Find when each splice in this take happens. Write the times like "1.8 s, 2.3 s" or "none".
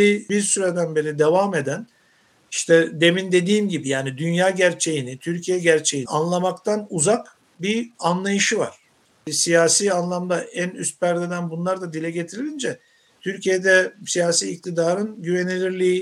6.1 s, 9.2 s